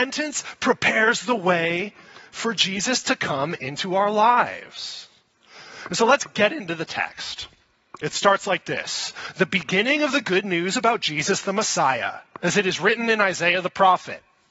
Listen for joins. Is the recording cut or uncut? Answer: cut